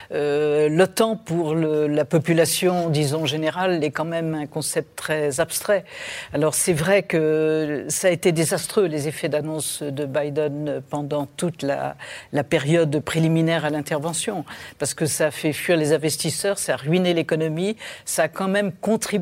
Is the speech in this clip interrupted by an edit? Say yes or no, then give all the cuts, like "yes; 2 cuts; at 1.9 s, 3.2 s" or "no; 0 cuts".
no; 0 cuts